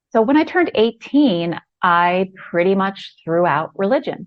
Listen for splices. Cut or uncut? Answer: uncut